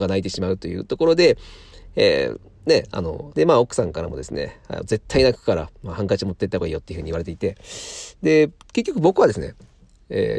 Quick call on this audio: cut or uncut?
cut